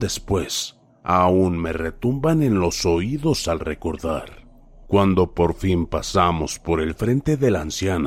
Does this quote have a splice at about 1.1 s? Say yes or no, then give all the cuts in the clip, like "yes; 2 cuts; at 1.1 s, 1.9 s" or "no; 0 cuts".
no; 1 cut; at 4.9 s